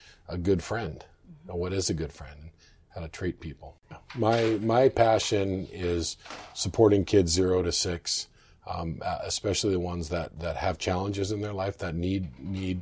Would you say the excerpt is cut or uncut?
cut